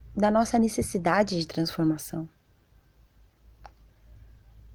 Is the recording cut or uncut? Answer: uncut